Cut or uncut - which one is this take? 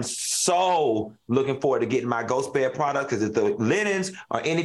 uncut